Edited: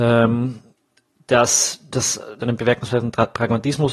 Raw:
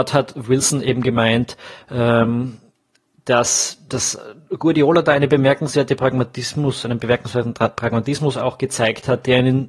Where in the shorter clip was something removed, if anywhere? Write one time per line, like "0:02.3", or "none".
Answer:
0:02.4